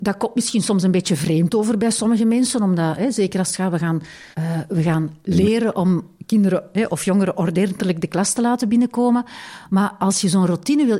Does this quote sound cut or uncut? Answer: cut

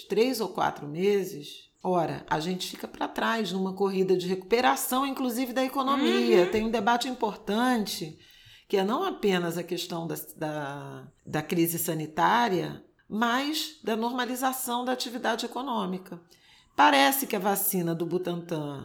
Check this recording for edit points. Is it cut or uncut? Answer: cut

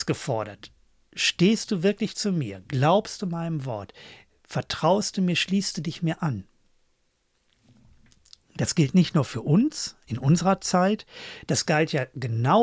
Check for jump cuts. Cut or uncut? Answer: uncut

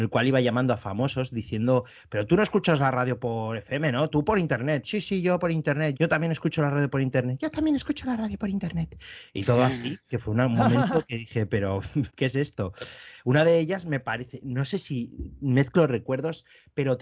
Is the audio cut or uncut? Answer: cut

